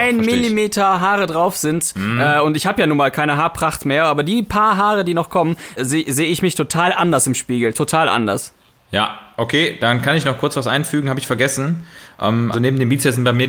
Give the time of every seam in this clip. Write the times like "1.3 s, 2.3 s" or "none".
5.8 s, 12.5 s